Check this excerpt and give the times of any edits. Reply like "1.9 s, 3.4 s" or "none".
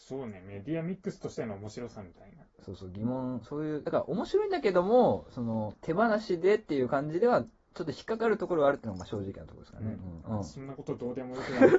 10.2 s